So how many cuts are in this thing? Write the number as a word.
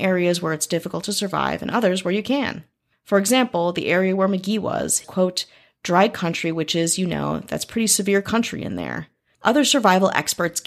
one